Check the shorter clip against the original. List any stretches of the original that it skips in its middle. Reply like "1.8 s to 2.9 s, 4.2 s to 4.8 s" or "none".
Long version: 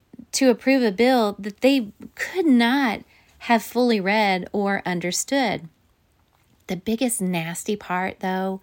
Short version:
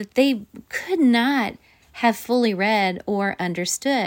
none